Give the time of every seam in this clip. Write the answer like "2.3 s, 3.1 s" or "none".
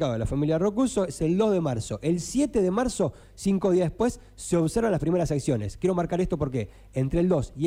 none